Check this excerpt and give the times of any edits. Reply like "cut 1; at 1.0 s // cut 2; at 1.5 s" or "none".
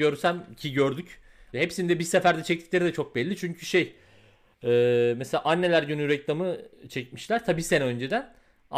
cut 1; at 1.5 s